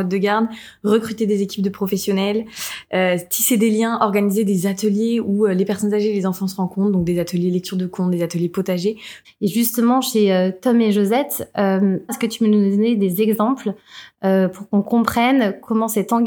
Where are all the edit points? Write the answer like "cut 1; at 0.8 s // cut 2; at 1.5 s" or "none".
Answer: cut 1; at 9.2 s // cut 2; at 12.1 s